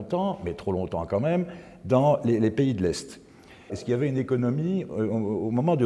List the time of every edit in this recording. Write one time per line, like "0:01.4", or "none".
0:03.7